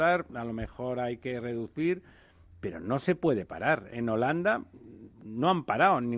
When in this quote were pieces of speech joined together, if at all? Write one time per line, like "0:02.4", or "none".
0:05.1